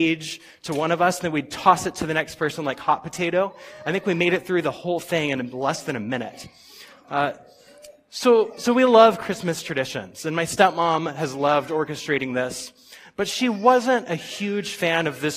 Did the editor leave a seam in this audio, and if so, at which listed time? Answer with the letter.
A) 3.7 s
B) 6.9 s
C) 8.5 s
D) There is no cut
D